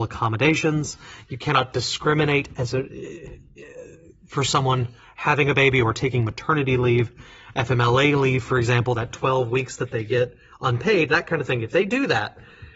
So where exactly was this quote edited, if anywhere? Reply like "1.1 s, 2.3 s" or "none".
none